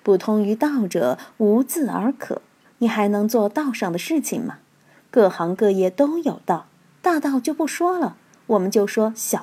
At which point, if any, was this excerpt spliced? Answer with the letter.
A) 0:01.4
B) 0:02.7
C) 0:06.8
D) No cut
B